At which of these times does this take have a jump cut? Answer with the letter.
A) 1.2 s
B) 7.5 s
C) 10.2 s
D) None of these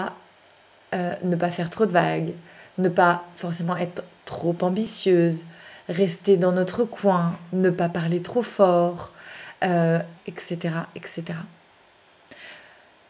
C